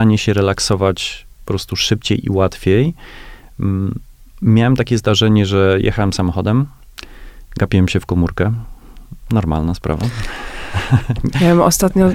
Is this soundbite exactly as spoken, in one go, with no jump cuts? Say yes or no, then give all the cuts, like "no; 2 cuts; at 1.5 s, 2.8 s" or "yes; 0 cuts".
yes; 0 cuts